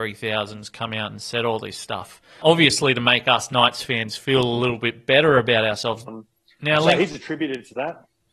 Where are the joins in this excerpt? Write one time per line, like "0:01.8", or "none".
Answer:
0:02.4
0:06.1